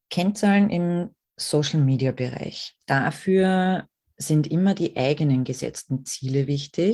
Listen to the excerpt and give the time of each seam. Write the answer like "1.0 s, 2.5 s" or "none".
none